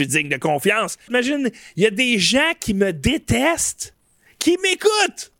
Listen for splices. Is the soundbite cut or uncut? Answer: cut